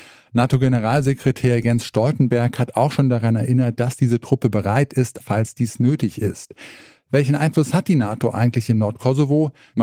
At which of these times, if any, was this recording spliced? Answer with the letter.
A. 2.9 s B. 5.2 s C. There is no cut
B